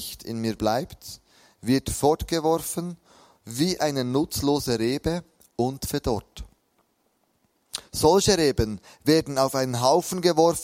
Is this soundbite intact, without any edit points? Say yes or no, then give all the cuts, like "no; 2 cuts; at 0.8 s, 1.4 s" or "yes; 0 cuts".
yes; 0 cuts